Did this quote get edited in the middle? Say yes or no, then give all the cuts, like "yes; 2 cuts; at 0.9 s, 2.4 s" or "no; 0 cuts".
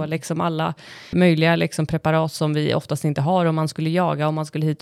yes; 1 cut; at 1.1 s